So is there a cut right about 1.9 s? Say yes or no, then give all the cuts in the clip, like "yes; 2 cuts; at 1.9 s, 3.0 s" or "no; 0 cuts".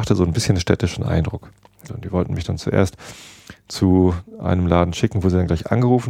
yes; 1 cut; at 1.9 s